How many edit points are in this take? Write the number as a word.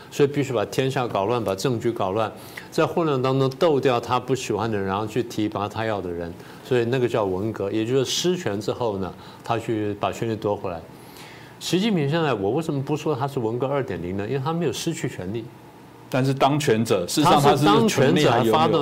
zero